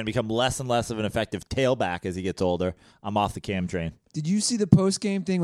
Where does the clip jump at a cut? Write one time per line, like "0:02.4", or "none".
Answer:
none